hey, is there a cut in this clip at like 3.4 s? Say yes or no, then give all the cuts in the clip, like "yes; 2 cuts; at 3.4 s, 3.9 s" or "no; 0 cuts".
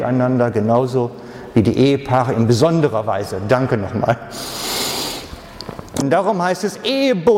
no; 1 cut; at 6.0 s